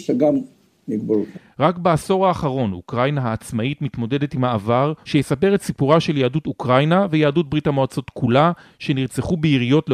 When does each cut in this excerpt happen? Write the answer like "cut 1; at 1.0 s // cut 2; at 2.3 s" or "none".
cut 1; at 5.0 s